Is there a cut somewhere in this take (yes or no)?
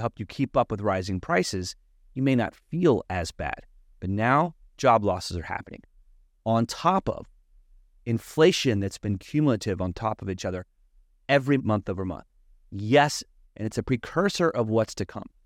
yes